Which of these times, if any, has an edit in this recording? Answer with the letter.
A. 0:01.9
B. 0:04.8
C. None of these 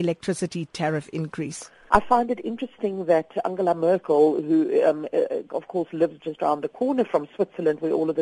A